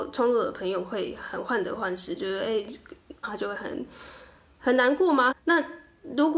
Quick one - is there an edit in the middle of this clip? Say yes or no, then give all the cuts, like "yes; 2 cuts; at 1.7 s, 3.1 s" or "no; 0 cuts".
yes; 2 cuts; at 3.2 s, 5.3 s